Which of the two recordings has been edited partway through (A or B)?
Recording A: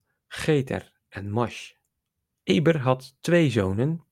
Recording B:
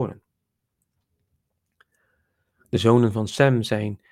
A